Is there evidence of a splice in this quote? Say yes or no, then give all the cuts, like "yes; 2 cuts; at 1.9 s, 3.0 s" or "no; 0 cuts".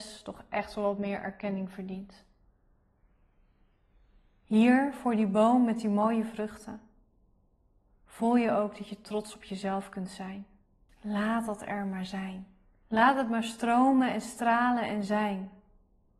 yes; 2 cuts; at 10.9 s, 12.8 s